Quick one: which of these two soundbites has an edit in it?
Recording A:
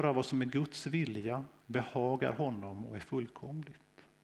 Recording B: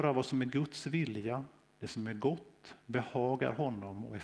A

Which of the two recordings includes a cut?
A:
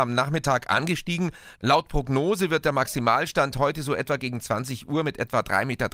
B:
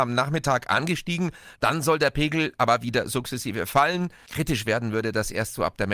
B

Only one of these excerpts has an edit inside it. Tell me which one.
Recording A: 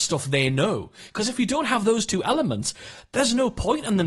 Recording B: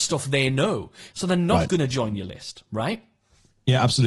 B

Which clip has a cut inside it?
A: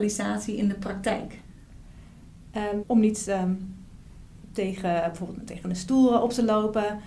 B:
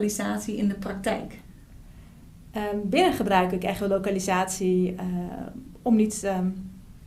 A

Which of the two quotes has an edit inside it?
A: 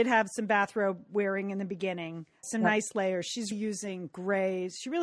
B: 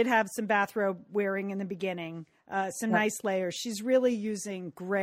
A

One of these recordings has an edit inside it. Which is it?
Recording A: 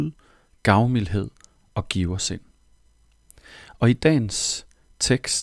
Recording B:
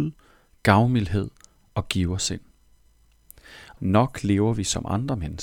B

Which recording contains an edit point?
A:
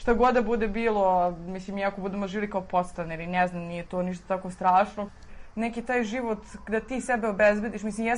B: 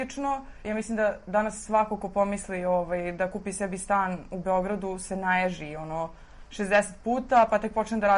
A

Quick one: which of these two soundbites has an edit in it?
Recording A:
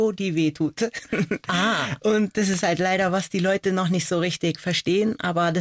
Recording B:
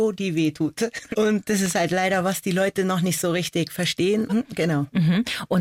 B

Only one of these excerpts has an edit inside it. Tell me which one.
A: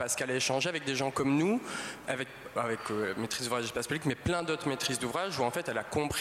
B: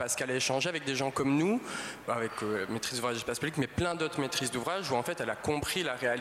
B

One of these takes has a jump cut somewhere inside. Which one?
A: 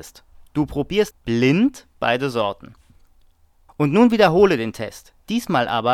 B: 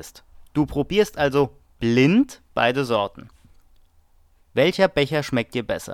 A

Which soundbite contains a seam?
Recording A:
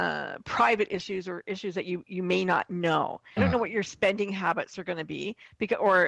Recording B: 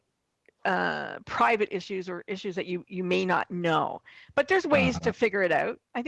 A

